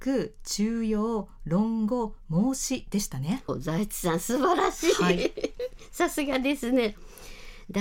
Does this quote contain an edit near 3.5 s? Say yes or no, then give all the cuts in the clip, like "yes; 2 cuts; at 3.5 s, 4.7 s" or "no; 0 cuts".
yes; 1 cut; at 3.5 s